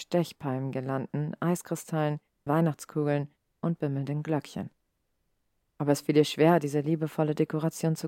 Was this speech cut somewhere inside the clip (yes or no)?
yes